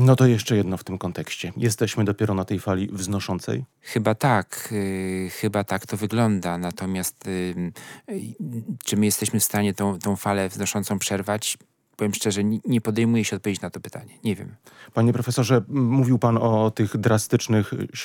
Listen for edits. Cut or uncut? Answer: cut